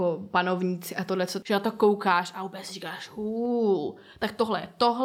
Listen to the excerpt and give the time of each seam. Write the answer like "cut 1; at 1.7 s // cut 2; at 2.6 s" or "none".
cut 1; at 1.4 s